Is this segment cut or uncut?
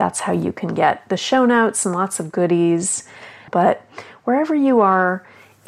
cut